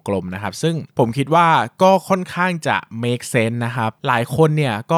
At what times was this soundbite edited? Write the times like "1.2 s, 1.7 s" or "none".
0.9 s